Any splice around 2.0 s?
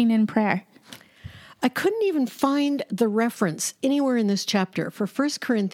no; 0 cuts

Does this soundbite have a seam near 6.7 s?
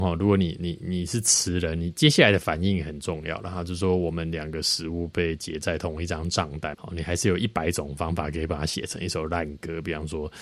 yes; 1 cut; at 6.7 s

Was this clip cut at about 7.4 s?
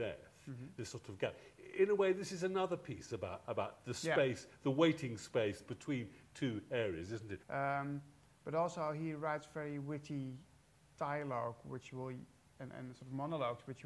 yes; 1 cut; at 7.4 s

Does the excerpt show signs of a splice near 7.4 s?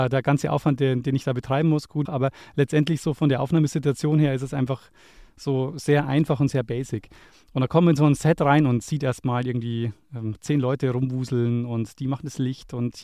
no; 1 cut; at 2.1 s

